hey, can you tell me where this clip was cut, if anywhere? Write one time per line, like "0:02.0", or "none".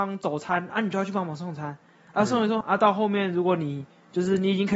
0:02.6